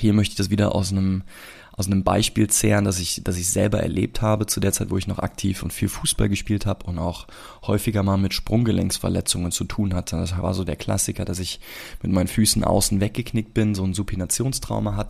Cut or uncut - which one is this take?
uncut